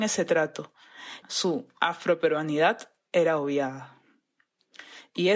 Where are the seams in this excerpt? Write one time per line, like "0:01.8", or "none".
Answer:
0:01.2